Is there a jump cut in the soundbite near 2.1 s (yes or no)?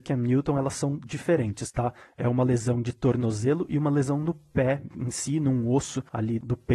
no